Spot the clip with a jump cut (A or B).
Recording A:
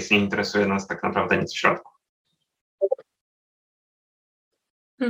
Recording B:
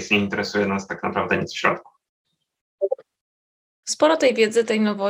B